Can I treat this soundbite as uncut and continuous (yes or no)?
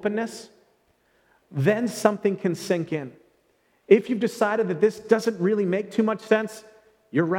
no